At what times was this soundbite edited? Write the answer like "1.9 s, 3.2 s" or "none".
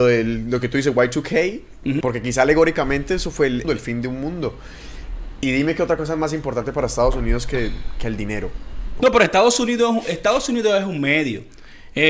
2.0 s, 3.6 s, 9.0 s